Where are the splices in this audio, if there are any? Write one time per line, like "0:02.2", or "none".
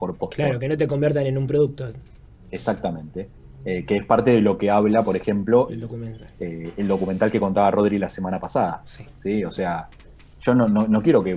0:05.7